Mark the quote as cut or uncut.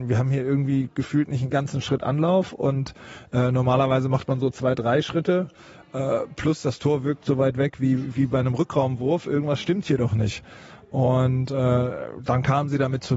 uncut